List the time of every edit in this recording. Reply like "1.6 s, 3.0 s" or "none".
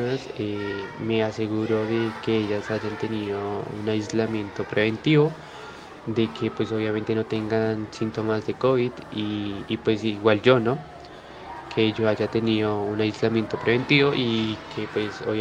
none